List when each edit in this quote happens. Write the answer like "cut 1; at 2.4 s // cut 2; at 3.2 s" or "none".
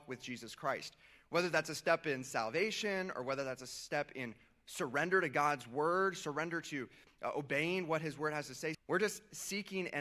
cut 1; at 8.7 s